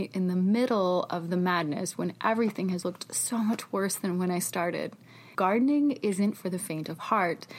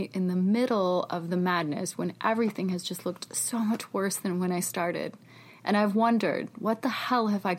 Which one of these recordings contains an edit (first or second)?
first